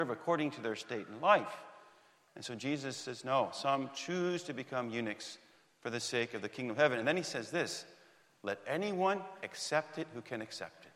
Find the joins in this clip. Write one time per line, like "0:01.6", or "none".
0:02.3